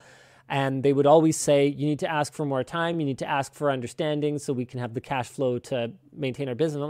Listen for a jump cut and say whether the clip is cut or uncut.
uncut